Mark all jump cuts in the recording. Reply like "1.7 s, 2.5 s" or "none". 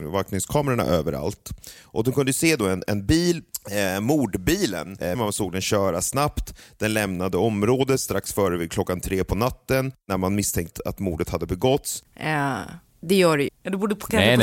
5.2 s, 12.0 s, 13.5 s

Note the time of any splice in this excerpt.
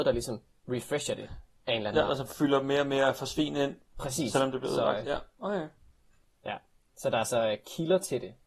none

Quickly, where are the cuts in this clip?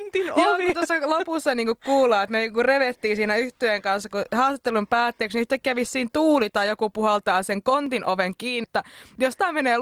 8.6 s

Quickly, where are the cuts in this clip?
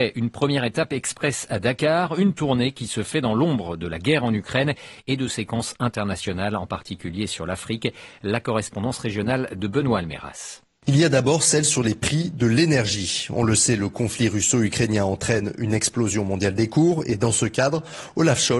none

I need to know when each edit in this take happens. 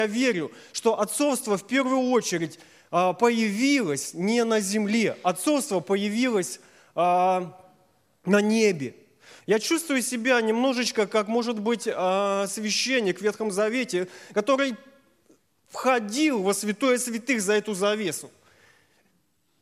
9.4 s

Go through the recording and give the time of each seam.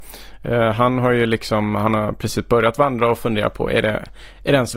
none

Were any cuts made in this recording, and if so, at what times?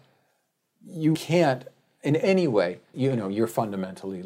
1.1 s, 2.9 s

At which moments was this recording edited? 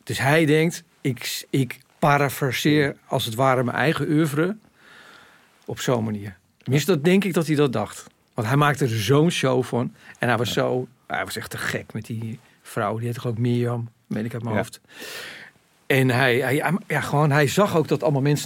none

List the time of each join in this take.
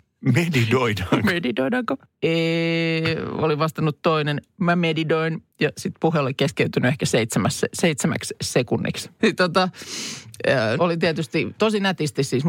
5.5 s, 9.2 s, 10.8 s

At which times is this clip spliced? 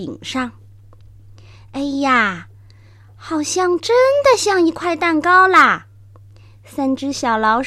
none

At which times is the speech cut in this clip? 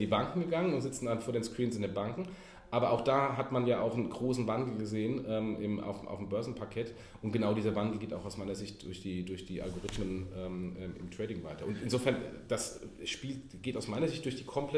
none

